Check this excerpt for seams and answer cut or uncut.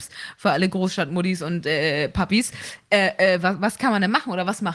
uncut